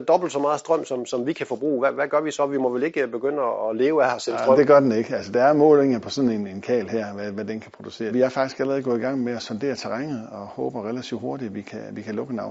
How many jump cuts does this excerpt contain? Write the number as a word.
one